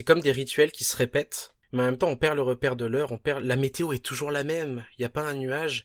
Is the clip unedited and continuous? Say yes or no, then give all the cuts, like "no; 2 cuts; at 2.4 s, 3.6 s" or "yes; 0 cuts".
yes; 0 cuts